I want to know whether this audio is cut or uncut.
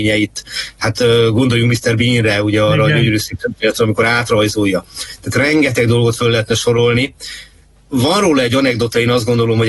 uncut